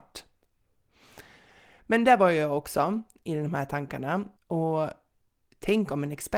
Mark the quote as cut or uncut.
cut